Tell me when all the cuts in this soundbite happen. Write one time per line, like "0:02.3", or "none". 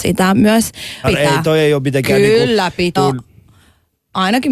0:01.0
0:03.0